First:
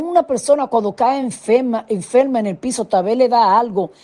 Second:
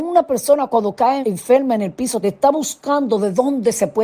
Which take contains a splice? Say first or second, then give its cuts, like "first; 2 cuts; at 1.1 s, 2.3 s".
second; 2 cuts; at 1.2 s, 2.2 s